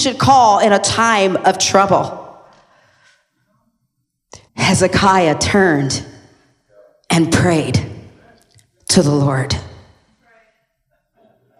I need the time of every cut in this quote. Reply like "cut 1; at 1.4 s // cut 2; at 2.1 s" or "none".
cut 1; at 4.5 s

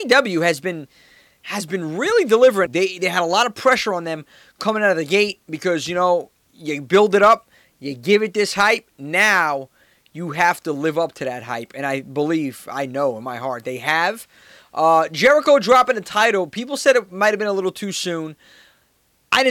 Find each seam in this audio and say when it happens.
cut 1; at 2.7 s

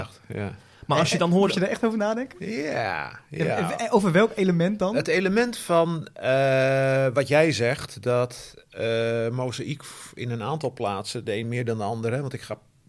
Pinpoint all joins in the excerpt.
none

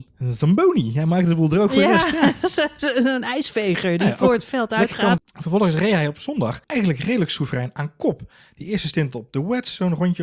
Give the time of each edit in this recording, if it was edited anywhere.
cut 1; at 5.2 s // cut 2; at 6.6 s

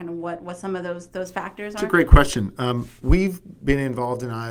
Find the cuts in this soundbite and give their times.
none

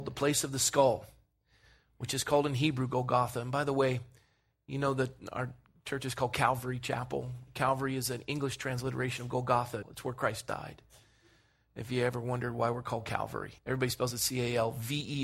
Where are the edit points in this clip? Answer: cut 1; at 9.8 s // cut 2; at 13.6 s

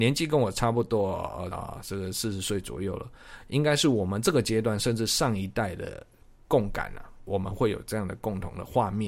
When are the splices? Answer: cut 1; at 1.5 s

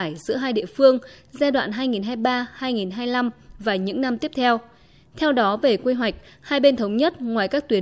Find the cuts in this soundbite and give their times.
none

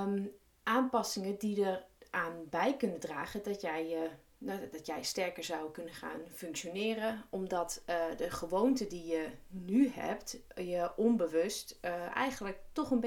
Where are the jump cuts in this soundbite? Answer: none

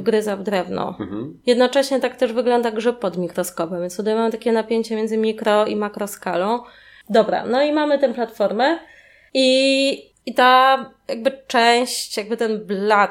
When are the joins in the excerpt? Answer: cut 1; at 7.0 s

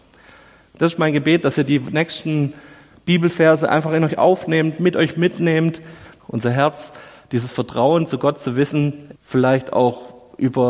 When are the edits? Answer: cut 1; at 6.2 s // cut 2; at 9.2 s

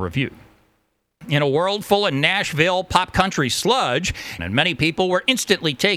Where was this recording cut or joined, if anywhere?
cut 1; at 1.2 s // cut 2; at 4.4 s

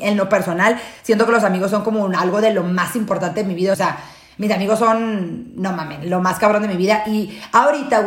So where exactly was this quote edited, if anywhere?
cut 1; at 3.7 s

